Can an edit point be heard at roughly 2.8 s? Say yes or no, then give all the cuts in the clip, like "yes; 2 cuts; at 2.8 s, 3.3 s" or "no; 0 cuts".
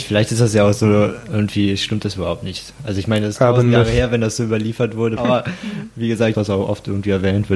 no; 2 cuts; at 5.2 s, 6.3 s